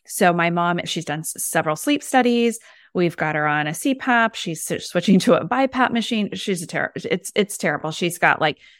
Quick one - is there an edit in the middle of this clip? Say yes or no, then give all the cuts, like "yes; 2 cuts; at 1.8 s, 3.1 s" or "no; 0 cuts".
no; 0 cuts